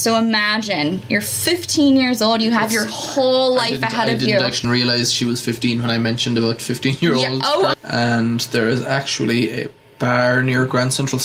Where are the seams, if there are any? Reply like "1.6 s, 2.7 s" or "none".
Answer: 4.6 s, 7.7 s

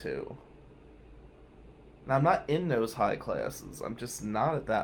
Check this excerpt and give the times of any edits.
2.0 s

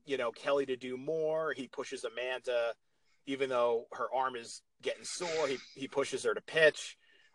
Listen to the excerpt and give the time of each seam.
none

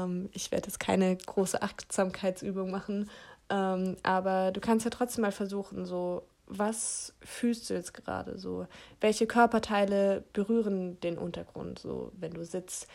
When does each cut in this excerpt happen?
none

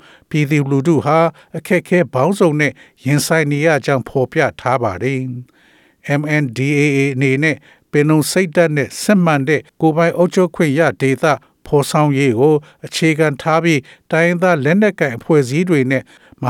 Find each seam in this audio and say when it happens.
9.7 s

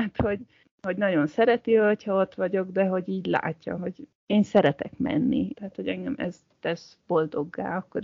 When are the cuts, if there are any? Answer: 3.8 s, 5.5 s

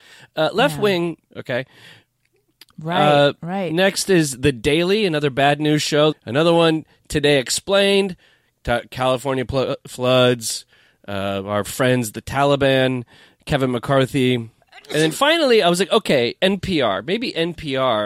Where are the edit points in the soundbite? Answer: 1.3 s, 6.1 s

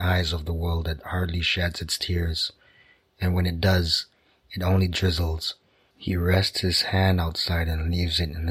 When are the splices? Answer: 5.9 s

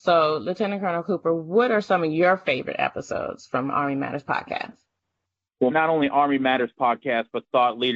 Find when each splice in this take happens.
5.7 s

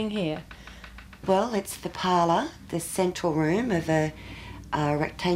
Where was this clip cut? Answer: none

